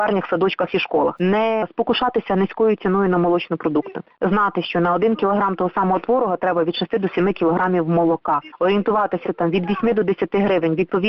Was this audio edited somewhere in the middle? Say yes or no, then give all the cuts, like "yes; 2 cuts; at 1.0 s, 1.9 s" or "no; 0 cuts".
yes; 2 cuts; at 1.2 s, 9.2 s